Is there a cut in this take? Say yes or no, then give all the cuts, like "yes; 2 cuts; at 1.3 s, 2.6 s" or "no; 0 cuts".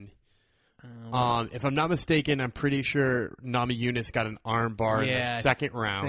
no; 0 cuts